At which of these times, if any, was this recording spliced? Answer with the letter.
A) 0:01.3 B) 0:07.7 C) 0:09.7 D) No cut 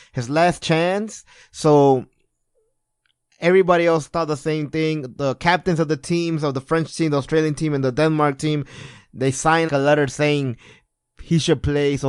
C